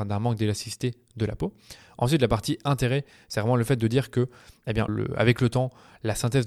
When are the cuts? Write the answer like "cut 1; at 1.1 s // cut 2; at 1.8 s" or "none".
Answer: cut 1; at 4.9 s